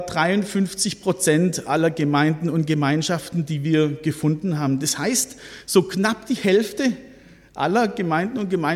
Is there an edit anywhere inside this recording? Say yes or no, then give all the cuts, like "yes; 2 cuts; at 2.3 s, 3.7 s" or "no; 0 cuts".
no; 0 cuts